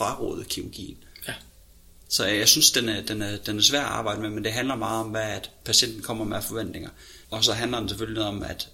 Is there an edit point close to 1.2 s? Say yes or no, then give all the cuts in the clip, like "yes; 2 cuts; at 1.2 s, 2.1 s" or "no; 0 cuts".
no; 1 cut; at 7.2 s